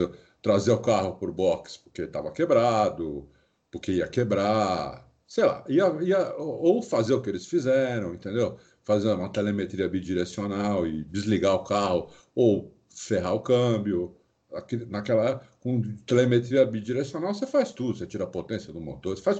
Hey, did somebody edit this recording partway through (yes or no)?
no